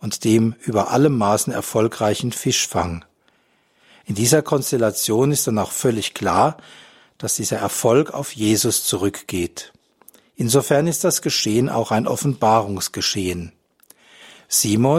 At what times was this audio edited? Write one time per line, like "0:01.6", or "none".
none